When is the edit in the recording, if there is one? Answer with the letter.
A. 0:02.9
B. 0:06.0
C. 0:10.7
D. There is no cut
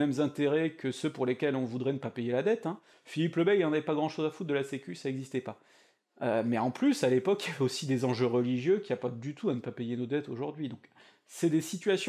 A